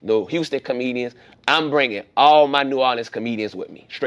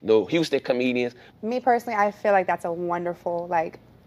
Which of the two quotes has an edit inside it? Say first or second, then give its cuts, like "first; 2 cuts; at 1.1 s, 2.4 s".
second; 1 cut; at 1.3 s